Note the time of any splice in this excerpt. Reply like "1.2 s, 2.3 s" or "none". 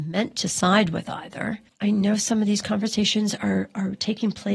1.7 s